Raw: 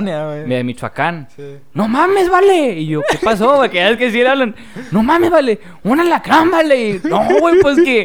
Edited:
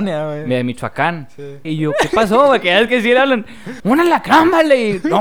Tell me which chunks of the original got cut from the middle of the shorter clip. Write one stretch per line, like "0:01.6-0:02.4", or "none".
0:01.7-0:02.7
0:04.9-0:05.8